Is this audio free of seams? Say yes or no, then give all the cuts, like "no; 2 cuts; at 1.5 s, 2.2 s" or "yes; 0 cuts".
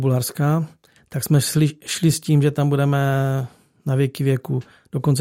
yes; 0 cuts